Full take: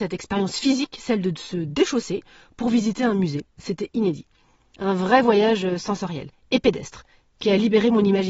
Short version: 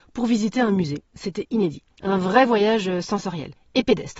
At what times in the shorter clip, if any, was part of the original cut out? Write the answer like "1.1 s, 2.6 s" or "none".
1.9 s